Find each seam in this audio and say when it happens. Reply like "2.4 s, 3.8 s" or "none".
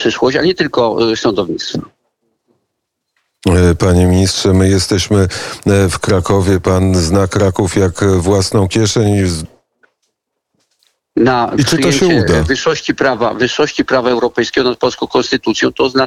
9.5 s